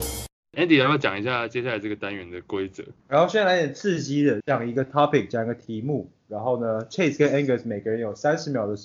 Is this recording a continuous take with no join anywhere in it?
no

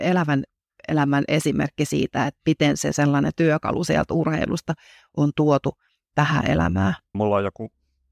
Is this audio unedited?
no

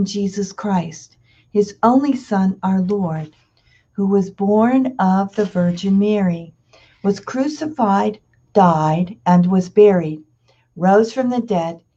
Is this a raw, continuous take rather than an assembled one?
yes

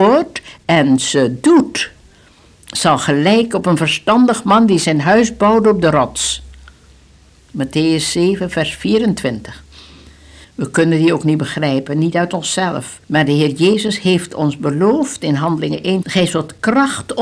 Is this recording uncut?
no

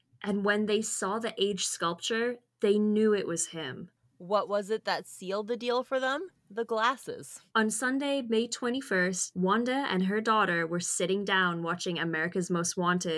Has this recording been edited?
yes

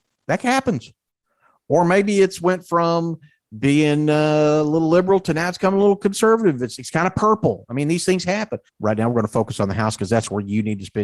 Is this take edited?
yes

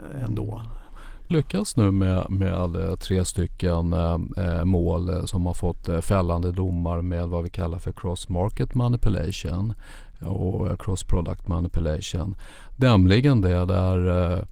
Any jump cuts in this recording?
yes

